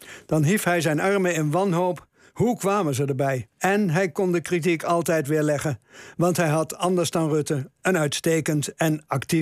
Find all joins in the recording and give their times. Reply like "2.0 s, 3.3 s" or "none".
3.5 s

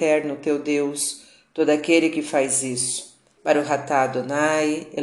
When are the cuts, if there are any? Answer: 3.4 s

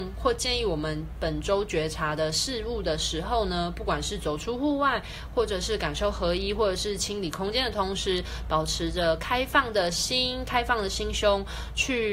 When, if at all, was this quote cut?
none

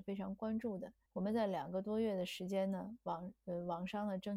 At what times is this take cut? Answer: 1.1 s

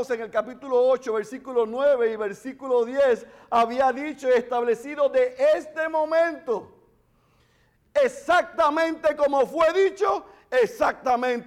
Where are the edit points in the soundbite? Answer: 7.8 s

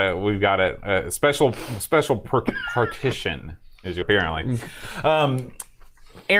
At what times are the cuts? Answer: 4.0 s

